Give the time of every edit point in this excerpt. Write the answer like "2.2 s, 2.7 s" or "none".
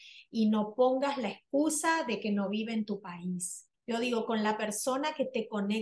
3.7 s